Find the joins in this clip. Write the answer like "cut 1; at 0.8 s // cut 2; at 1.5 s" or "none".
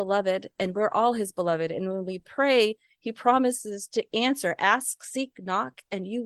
none